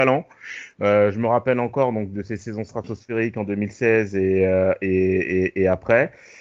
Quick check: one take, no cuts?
yes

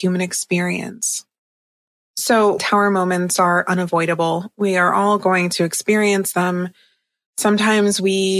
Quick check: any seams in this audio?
yes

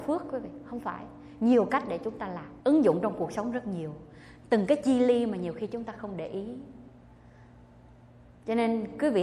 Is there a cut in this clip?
yes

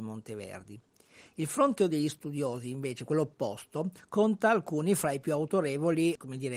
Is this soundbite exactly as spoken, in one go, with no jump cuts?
yes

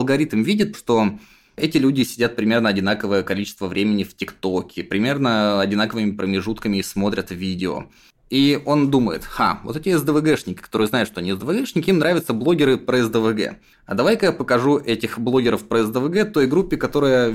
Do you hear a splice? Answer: no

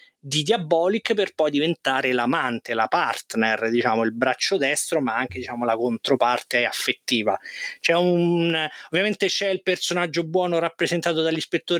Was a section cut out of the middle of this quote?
no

